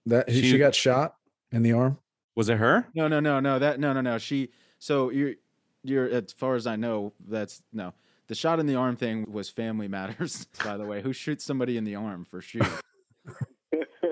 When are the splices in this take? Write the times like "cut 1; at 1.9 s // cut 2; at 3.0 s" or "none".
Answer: cut 1; at 9.2 s // cut 2; at 10.5 s

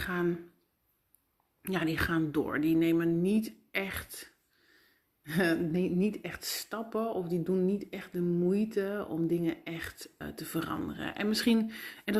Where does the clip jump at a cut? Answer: cut 1; at 10.2 s

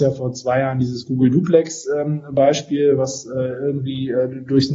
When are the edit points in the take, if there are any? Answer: none

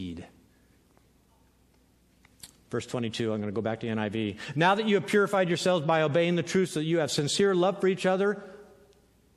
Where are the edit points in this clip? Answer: none

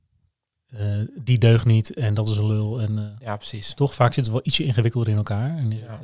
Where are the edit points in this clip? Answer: none

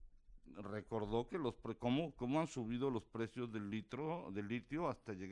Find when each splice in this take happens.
none

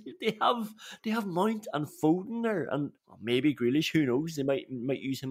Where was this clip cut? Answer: cut 1; at 3.0 s

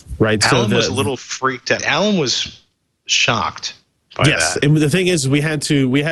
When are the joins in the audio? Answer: cut 1; at 1.8 s

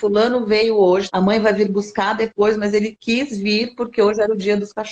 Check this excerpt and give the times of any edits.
cut 1; at 1.1 s

